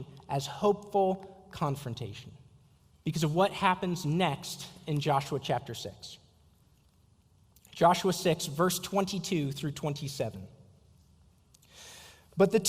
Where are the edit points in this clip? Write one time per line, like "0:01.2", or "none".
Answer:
0:02.9